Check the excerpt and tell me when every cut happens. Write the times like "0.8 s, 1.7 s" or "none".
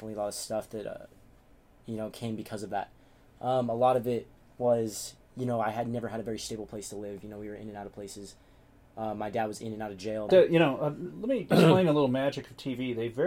10.3 s